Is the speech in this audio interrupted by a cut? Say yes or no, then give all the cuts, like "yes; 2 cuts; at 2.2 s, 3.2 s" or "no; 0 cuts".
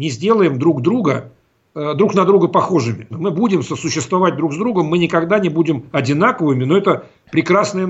yes; 1 cut; at 3.1 s